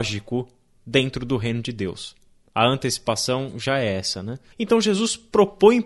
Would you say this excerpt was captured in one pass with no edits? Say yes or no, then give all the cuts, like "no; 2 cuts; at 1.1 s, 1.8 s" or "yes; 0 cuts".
no; 1 cut; at 4.5 s